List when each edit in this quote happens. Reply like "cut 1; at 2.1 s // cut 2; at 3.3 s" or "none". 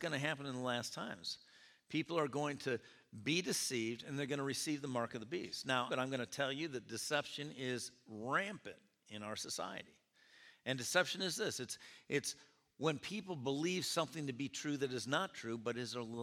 cut 1; at 5.9 s